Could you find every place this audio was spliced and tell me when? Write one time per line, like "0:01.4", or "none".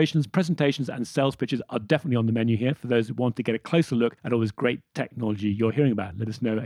0:04.2